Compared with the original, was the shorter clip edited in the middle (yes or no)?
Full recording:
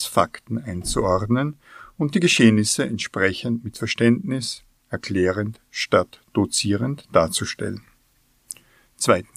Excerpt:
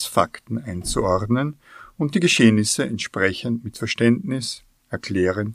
no